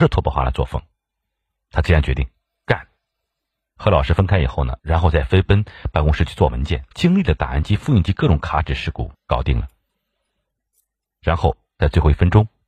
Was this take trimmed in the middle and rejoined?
yes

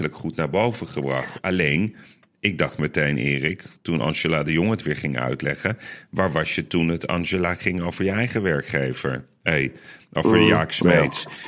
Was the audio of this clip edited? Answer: no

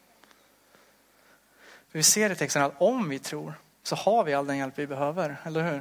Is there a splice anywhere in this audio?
no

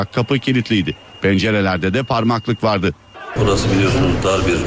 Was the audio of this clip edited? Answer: yes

